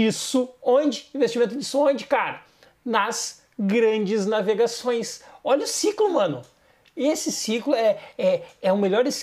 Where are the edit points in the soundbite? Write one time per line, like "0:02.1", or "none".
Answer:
none